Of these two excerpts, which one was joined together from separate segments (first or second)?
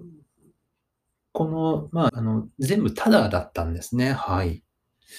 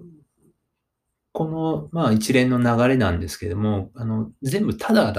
first